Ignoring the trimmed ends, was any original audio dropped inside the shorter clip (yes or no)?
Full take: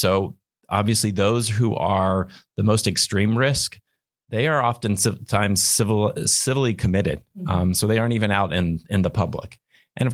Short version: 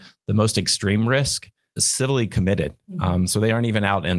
yes